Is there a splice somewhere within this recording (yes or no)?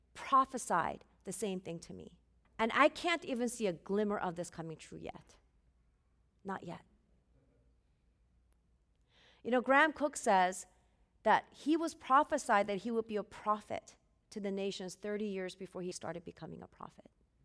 yes